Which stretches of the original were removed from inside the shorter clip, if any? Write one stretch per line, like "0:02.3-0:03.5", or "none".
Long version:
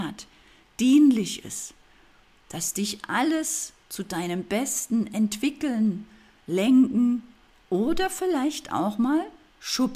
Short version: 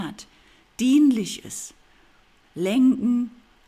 0:02.4-0:06.4